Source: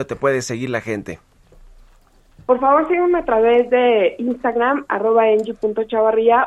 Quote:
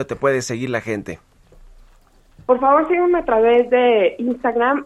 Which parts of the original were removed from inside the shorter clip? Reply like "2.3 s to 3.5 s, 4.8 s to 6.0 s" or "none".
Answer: none

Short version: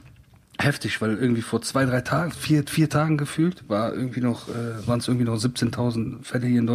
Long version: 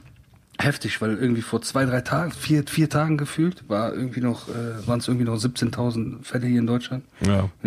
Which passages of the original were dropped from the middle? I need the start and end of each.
none

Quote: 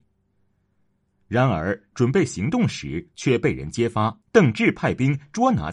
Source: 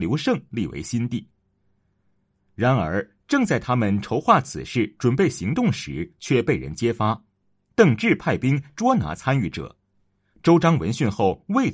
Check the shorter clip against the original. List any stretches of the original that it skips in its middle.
3.2 s to 5.0 s, 7.3 s to 7.7 s

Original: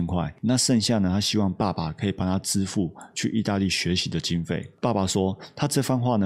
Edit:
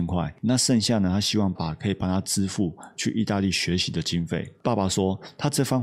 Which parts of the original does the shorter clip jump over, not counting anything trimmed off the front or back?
1.5 s to 1.7 s

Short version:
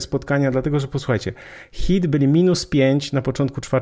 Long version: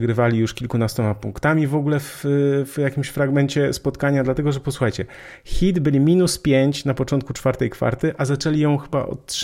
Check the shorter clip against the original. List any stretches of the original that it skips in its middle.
none

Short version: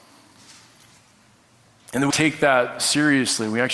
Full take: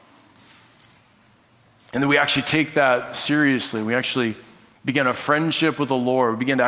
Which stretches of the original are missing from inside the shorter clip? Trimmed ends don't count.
2.1 s to 2.4 s

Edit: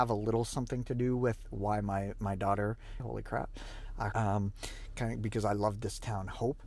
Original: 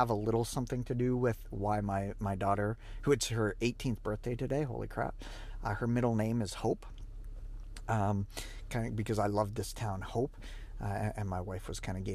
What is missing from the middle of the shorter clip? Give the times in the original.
3.0 s to 4.6 s, 5.8 s to 7.9 s

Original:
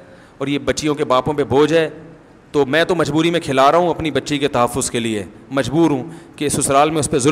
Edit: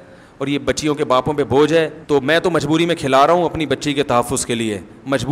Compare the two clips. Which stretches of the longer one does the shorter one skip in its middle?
2.0 s to 2.5 s

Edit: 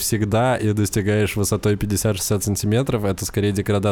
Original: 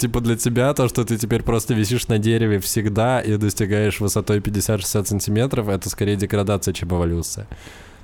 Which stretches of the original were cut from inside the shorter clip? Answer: none

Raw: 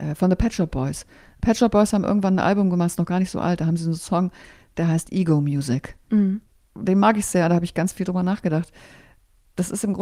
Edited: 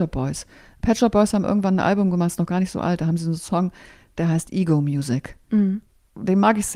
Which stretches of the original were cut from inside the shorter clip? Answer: none

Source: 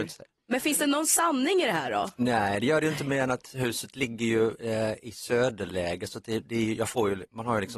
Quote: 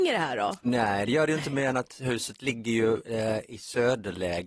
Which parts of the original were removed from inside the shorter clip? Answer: none

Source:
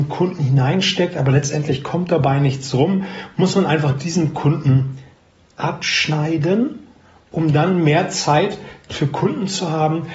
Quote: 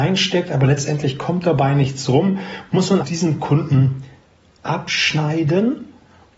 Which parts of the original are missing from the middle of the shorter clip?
3.7 s to 3.9 s

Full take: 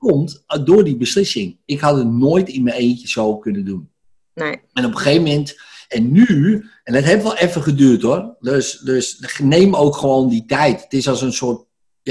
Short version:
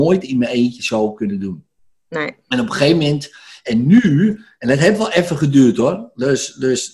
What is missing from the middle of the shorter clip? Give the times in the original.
none

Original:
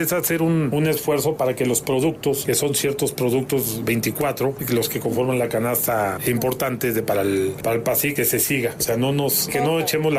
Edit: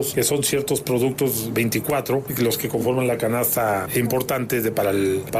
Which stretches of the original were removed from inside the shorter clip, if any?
none

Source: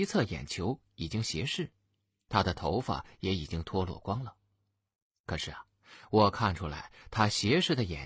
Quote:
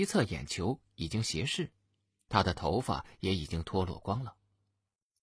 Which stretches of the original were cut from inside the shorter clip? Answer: none

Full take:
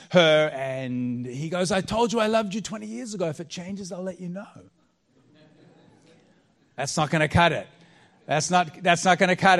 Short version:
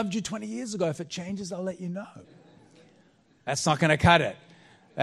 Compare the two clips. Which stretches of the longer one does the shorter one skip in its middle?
4.6 s to 5.6 s

